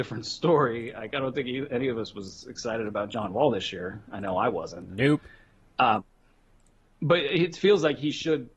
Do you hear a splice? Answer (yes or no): no